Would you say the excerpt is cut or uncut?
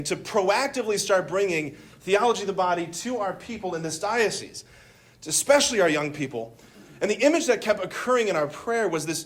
uncut